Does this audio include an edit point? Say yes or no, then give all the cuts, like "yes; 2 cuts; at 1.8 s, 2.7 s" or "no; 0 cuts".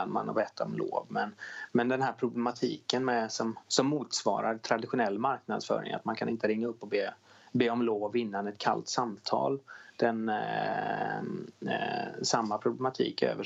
no; 0 cuts